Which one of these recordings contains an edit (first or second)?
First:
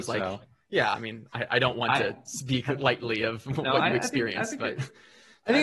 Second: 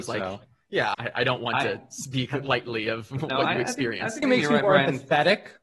second